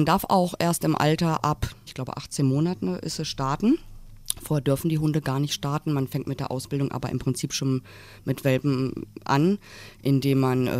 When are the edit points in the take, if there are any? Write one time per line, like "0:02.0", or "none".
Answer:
0:01.9

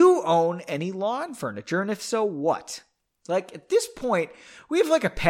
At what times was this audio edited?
none

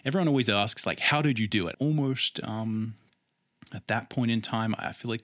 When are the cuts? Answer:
0:01.7

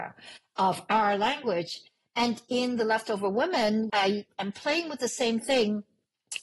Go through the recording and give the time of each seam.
0:03.9

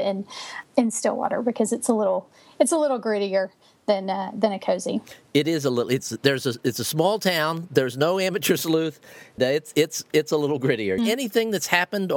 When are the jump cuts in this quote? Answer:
0:09.4
0:11.0

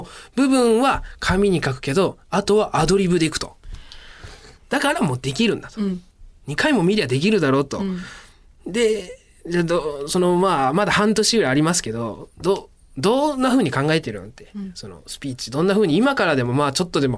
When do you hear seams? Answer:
0:04.5

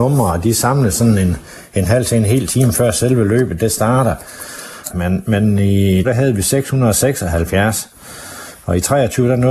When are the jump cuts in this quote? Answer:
0:04.9
0:06.0

